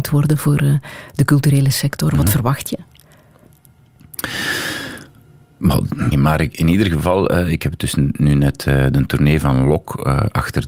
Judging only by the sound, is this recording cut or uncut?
cut